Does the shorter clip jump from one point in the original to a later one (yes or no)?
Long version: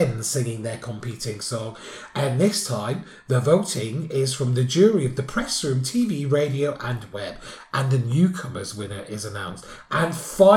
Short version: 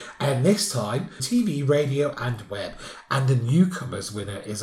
yes